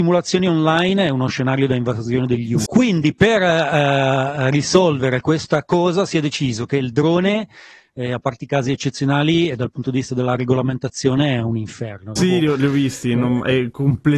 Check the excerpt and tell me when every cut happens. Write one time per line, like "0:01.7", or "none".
0:02.7
0:12.2